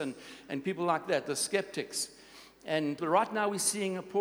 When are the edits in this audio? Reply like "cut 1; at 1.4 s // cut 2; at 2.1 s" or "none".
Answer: cut 1; at 3.0 s